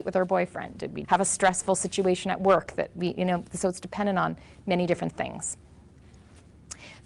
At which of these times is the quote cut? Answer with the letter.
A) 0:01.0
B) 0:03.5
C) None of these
A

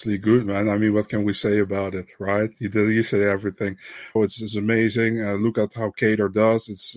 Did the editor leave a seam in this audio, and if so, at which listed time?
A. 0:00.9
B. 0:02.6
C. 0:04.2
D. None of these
C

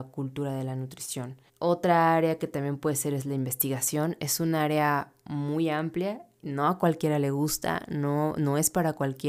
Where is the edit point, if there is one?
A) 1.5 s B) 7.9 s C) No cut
A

